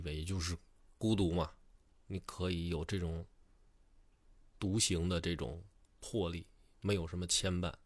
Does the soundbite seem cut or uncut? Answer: uncut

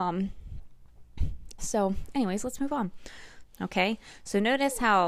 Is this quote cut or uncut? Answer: cut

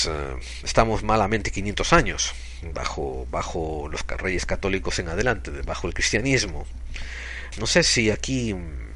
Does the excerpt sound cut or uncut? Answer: cut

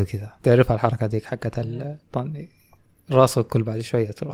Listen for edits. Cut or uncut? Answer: cut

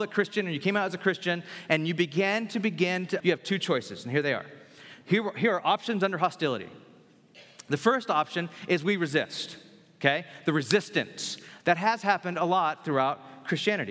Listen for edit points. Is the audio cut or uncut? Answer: cut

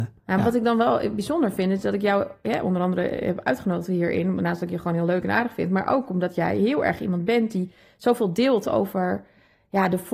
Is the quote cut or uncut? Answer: uncut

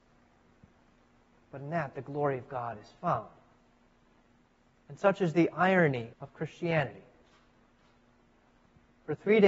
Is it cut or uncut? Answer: cut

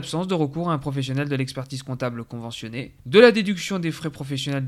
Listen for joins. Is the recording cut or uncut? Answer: cut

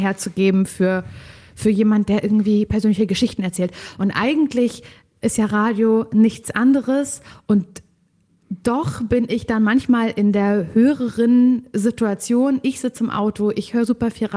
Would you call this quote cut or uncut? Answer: uncut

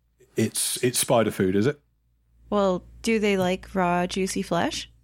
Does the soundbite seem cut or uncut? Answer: uncut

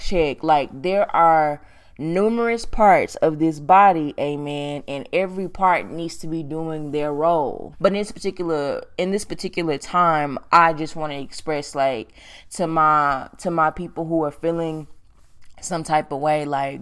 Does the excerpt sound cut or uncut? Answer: cut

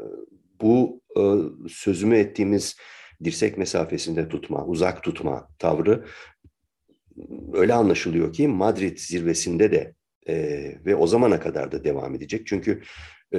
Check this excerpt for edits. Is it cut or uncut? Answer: uncut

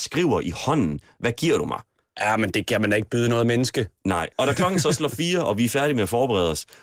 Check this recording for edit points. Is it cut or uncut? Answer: cut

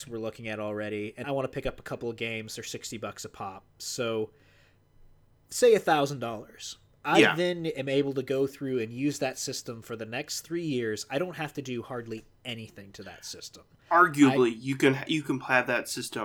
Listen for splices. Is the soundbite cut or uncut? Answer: cut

